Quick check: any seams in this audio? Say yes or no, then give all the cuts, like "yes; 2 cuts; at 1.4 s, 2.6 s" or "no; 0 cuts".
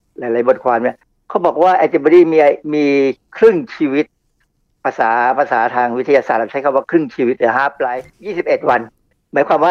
no; 0 cuts